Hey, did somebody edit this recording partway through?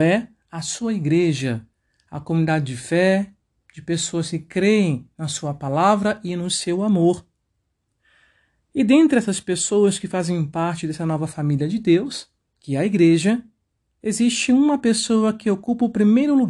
no; 0 cuts

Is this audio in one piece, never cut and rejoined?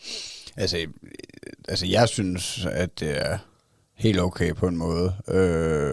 yes; 0 cuts

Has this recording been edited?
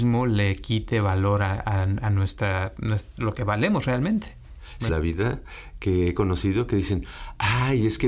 yes; 1 cut; at 4.9 s

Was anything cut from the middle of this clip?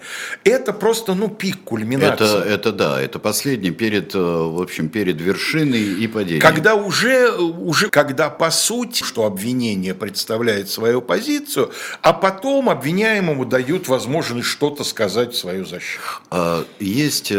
yes; 2 cuts; at 7.9 s, 9.0 s

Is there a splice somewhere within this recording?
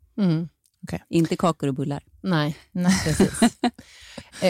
no; 0 cuts

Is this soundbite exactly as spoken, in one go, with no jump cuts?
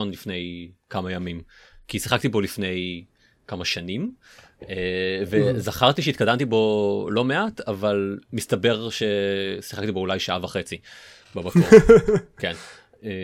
yes; 0 cuts

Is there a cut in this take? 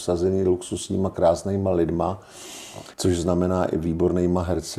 yes; 1 cut; at 2.9 s

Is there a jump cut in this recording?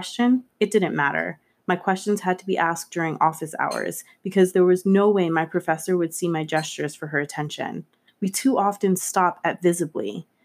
yes; 1 cut; at 8.1 s

